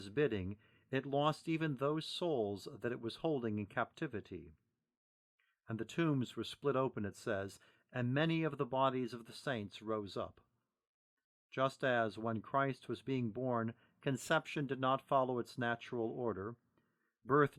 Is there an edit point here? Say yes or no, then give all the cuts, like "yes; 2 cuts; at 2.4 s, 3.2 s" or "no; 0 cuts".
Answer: no; 0 cuts